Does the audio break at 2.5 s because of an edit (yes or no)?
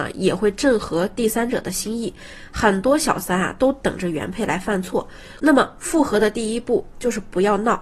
no